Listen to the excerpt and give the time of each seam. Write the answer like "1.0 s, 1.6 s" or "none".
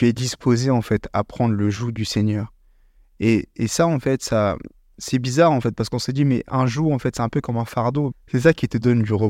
8.1 s